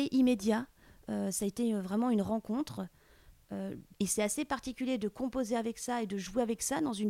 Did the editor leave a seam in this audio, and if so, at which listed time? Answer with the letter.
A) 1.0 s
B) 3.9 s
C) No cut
B